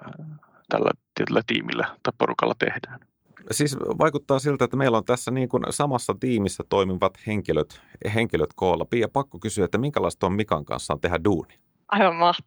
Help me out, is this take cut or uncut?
uncut